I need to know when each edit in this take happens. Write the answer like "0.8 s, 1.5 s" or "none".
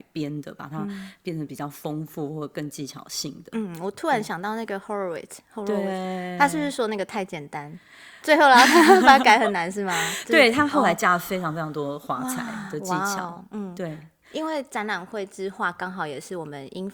none